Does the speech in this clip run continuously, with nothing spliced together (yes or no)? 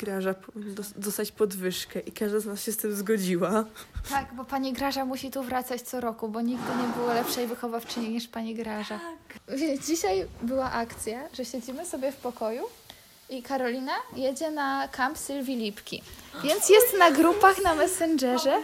yes